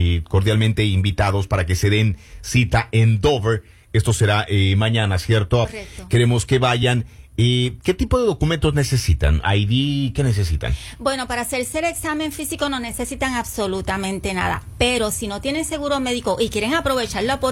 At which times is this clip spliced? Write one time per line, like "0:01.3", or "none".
0:05.7